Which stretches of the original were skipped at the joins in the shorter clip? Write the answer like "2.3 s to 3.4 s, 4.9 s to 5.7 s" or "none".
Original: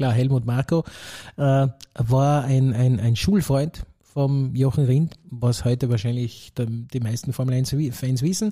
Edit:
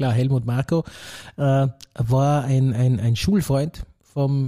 none